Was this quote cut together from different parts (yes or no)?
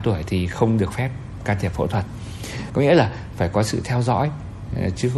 yes